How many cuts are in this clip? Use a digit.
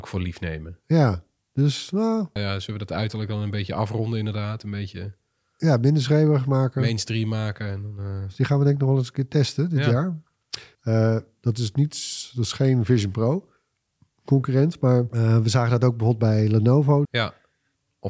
3